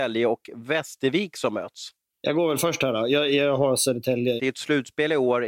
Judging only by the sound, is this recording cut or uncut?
cut